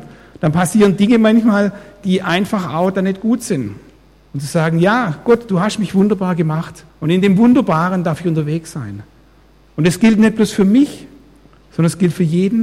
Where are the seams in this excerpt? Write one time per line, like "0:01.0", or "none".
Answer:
0:04.3
0:06.9